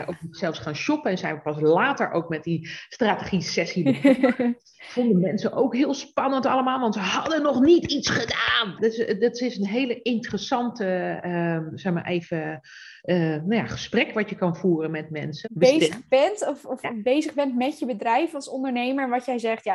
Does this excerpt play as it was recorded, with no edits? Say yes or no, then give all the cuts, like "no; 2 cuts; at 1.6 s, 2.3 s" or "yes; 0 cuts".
no; 2 cuts; at 8.8 s, 15.4 s